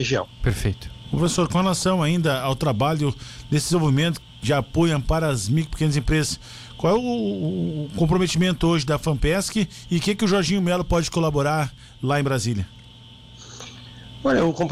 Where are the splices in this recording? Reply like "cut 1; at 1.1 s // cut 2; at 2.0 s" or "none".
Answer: cut 1; at 1.0 s